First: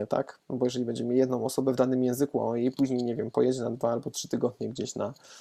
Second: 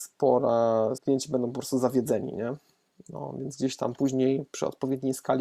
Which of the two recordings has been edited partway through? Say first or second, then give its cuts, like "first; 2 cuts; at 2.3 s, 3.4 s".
second; 1 cut; at 1.0 s